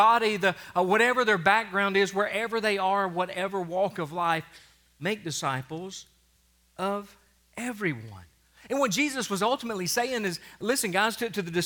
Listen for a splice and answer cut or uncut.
uncut